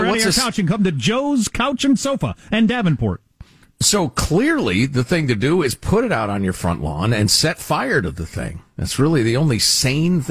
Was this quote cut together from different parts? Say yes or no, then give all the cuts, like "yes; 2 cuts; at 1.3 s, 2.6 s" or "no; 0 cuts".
no; 0 cuts